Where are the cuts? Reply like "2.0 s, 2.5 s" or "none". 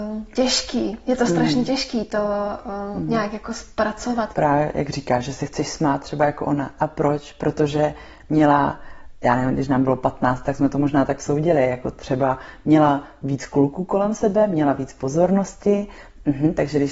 4.3 s